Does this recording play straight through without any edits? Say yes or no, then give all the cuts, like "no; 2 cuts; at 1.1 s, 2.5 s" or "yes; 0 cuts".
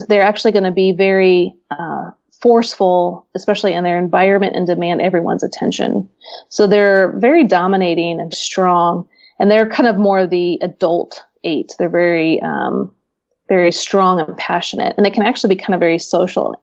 no; 1 cut; at 8.3 s